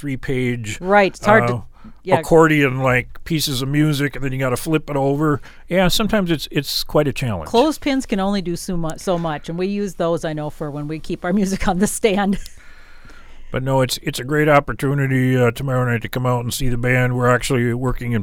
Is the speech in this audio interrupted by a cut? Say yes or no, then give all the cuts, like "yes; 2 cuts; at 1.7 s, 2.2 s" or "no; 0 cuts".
no; 0 cuts